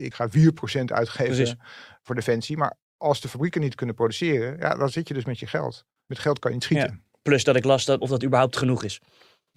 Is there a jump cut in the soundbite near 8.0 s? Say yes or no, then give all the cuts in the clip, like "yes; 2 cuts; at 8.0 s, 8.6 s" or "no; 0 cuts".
yes; 1 cut; at 8.0 s